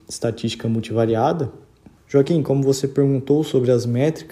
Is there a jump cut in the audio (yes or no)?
yes